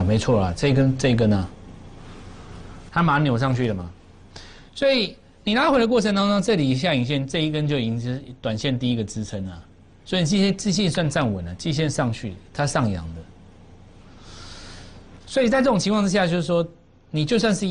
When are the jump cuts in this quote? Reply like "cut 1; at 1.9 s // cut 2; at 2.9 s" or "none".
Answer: none